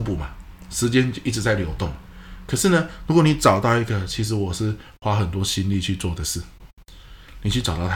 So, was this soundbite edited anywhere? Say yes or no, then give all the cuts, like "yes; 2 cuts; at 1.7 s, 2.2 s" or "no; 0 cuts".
no; 0 cuts